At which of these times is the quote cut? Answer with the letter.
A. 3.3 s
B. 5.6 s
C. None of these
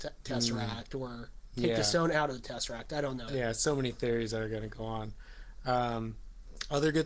A